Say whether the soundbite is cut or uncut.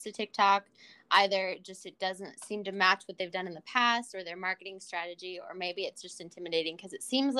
uncut